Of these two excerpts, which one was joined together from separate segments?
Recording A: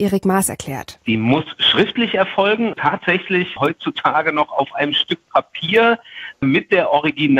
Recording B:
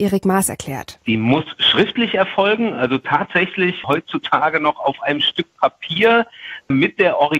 A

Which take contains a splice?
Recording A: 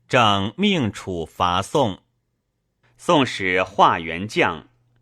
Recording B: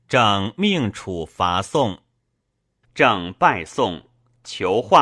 B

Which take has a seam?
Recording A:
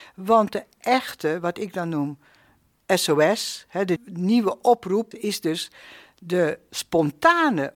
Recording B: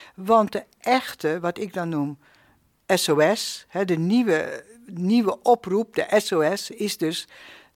A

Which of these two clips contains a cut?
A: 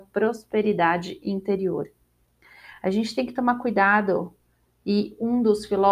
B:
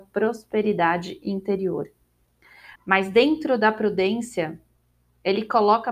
B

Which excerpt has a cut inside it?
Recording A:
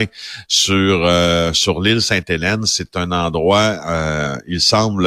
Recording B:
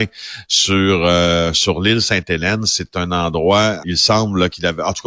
B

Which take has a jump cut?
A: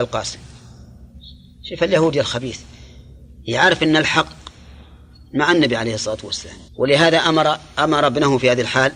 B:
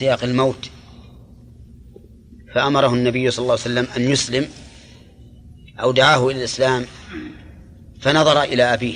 A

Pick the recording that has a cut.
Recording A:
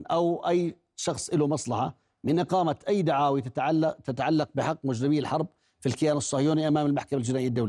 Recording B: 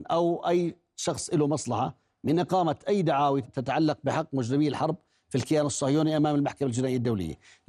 B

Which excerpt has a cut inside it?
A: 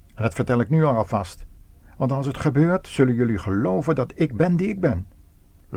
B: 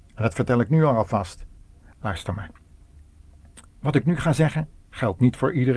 B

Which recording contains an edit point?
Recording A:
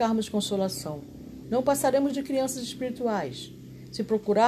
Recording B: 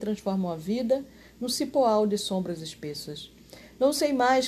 A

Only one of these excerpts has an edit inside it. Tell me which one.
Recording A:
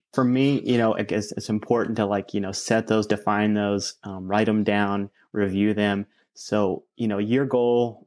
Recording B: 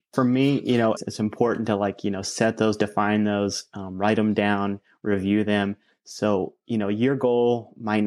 B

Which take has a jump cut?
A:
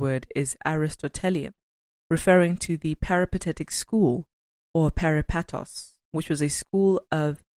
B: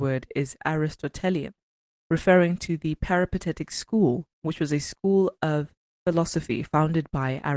B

